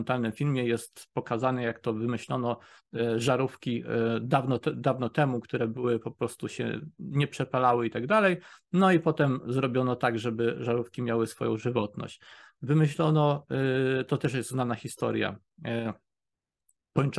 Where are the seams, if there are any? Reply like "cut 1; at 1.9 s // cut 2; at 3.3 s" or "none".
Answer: none

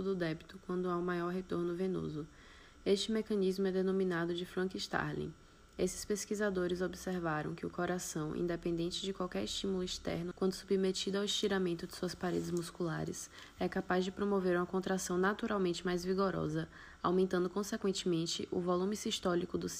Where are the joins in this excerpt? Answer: cut 1; at 10.3 s

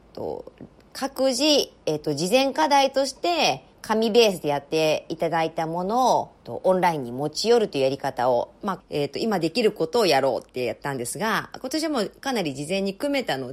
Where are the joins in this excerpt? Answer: cut 1; at 3.7 s // cut 2; at 6.4 s // cut 3; at 8.8 s

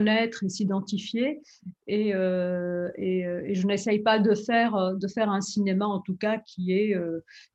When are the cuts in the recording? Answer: none

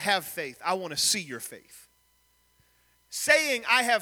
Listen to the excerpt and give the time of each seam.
none

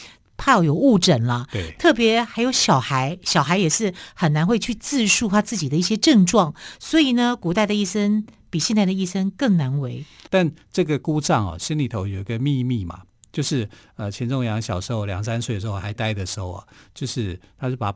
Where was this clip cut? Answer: cut 1; at 10.3 s // cut 2; at 16.0 s

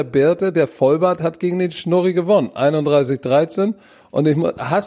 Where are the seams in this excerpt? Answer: none

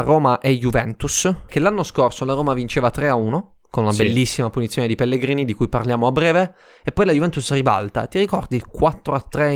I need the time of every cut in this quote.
cut 1; at 1.5 s

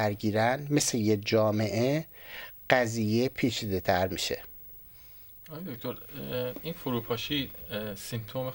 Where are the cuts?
none

